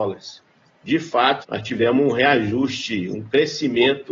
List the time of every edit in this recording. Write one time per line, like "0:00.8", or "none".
0:01.4

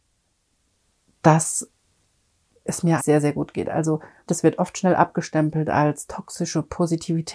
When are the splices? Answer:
0:03.0
0:04.3

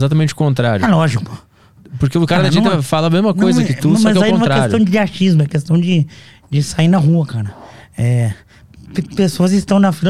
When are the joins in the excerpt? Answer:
0:01.8

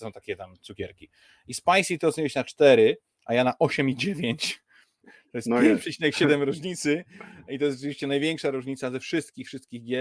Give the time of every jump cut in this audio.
0:05.0

